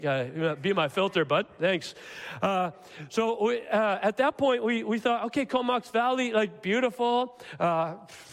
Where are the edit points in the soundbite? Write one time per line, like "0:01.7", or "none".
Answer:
none

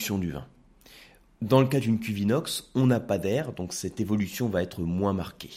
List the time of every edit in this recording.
none

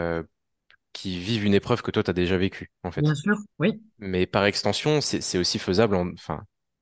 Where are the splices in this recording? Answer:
0:03.5
0:05.0

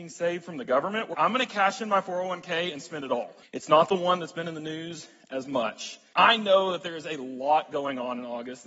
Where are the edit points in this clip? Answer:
0:01.1
0:03.4
0:06.1

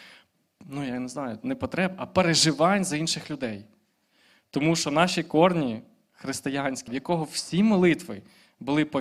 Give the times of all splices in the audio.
0:06.9

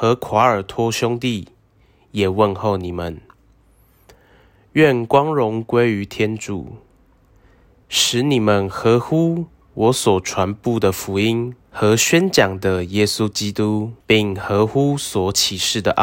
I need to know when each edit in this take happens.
0:07.8
0:11.7
0:14.0

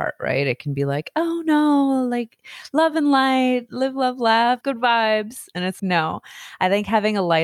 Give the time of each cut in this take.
0:04.6
0:05.8

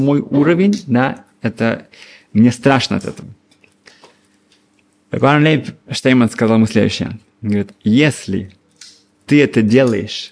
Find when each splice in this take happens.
none

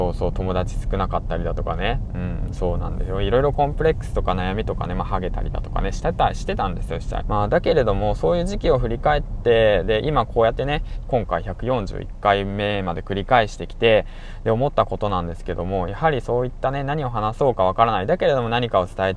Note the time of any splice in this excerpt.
0:07.2
0:11.0

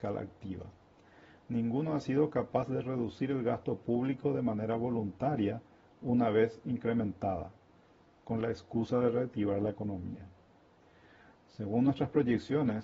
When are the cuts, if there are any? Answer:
none

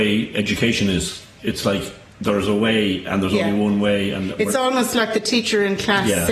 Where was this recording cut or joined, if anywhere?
0:01.4

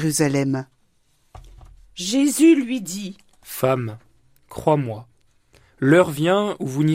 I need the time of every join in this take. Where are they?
none

